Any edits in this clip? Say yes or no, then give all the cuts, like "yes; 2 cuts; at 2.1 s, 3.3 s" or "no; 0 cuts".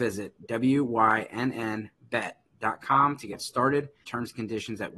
yes; 1 cut; at 4.0 s